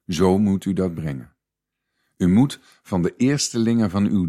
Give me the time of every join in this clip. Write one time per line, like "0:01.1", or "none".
none